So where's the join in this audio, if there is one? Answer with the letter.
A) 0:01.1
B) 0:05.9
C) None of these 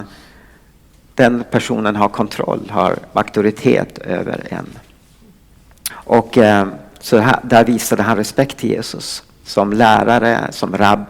B